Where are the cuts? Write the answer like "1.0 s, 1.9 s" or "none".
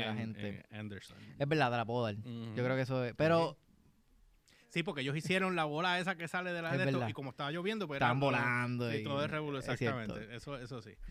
none